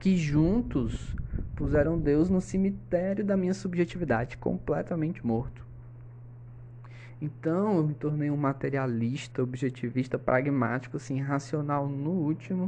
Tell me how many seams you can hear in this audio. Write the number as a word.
zero